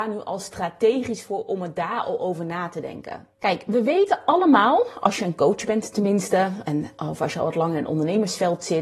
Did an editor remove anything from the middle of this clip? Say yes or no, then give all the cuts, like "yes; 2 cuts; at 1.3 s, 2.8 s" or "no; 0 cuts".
yes; 1 cut; at 3.3 s